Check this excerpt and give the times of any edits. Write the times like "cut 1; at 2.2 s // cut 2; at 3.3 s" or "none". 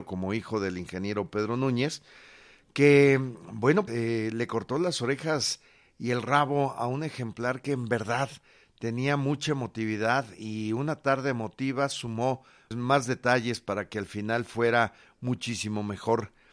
cut 1; at 3.9 s // cut 2; at 12.7 s